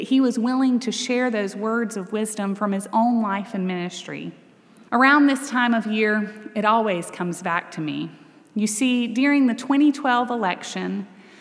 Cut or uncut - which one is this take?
cut